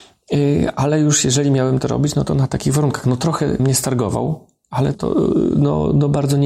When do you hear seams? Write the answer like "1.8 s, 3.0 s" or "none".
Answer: 3.6 s, 4.9 s